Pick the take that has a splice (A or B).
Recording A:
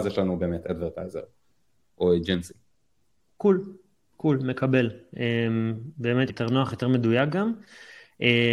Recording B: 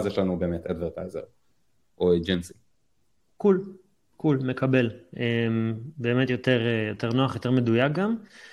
A